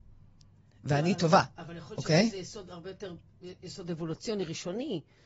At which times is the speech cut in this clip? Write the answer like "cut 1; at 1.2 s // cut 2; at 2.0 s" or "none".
none